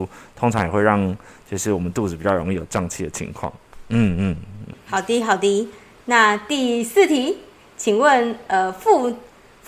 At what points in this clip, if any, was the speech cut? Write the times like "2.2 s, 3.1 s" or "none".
none